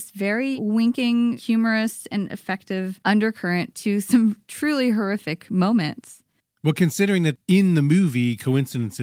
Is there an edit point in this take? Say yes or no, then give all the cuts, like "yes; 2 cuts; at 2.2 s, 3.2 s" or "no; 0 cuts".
no; 0 cuts